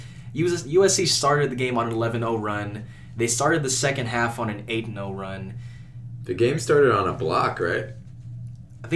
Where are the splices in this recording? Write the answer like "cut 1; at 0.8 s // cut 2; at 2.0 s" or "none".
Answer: none